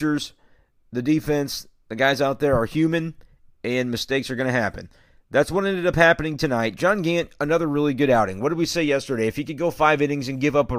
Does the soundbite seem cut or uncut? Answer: uncut